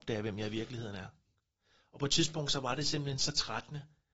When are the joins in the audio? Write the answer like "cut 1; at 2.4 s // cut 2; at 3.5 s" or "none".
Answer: none

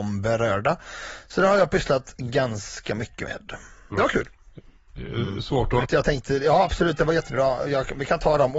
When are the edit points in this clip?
cut 1; at 3.9 s // cut 2; at 5.8 s

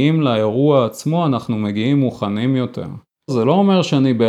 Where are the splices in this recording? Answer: cut 1; at 3.3 s

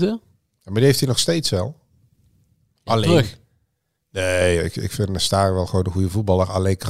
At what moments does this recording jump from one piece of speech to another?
none

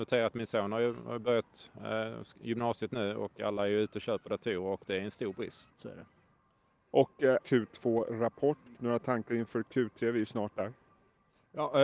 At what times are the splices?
cut 1; at 5.7 s // cut 2; at 7.4 s // cut 3; at 8.7 s

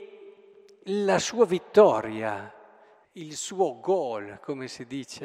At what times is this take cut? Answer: cut 1; at 3.0 s

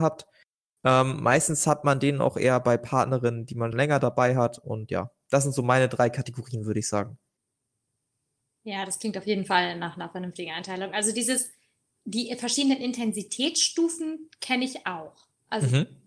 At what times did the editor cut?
cut 1; at 3.7 s

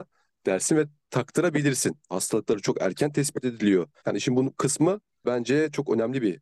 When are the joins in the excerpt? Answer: cut 1; at 2.1 s // cut 2; at 4.0 s

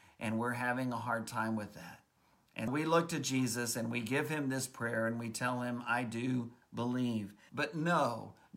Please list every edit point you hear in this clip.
cut 1; at 2.7 s // cut 2; at 7.5 s

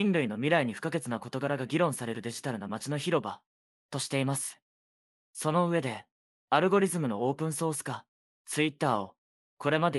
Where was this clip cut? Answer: cut 1; at 8.4 s

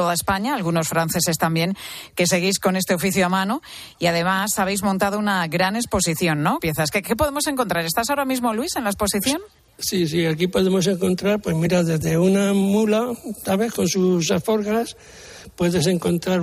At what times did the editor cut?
cut 1; at 6.6 s

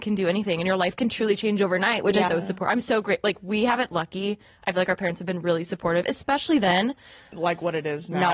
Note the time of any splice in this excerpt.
cut 1; at 2.3 s // cut 2; at 7.3 s

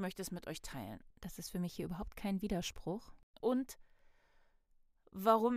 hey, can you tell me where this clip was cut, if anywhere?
cut 1; at 1.1 s // cut 2; at 3.4 s

